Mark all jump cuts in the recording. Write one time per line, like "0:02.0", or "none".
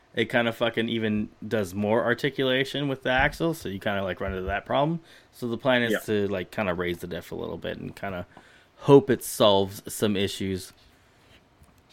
none

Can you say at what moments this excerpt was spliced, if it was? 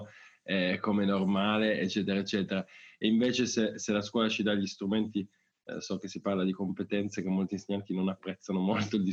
none

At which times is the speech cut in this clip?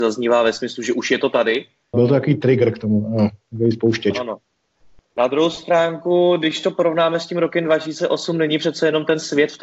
0:01.9

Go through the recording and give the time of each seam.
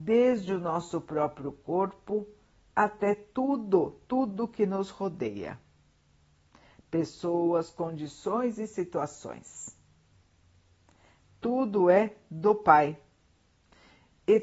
none

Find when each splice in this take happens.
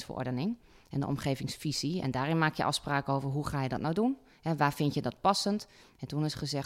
none

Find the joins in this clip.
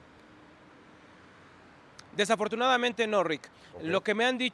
none

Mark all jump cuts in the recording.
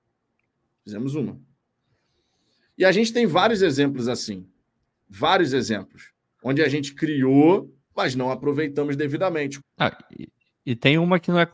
0:07.8
0:09.6

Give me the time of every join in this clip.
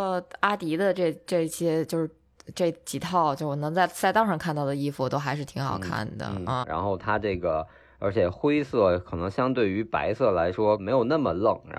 0:06.6
0:10.8

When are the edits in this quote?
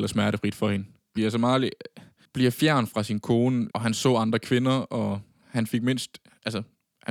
0:01.2
0:03.7

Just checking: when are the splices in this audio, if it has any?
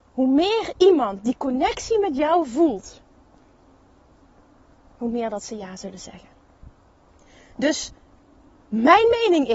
none

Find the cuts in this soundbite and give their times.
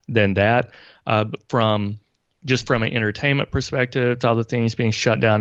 0:04.2

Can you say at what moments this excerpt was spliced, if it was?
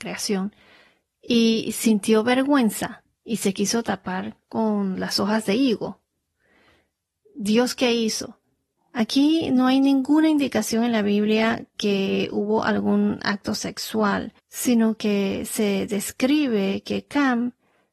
0:08.8
0:14.4

